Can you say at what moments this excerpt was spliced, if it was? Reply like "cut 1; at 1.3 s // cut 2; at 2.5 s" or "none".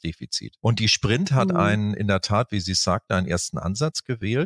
none